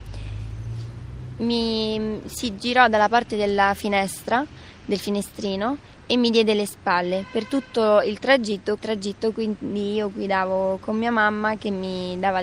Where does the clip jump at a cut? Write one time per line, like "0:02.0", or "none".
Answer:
0:08.8